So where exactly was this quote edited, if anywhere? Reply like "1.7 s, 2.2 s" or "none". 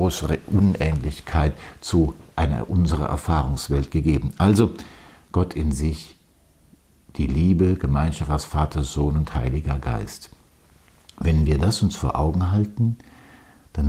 none